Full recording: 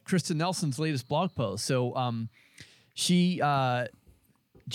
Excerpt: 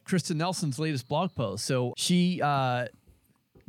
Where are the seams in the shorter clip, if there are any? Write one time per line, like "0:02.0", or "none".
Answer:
0:01.9